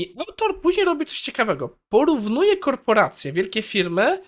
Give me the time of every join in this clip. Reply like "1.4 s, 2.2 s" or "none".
none